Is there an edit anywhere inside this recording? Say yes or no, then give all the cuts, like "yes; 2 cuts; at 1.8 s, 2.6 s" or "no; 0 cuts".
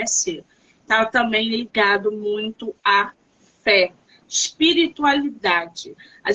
no; 0 cuts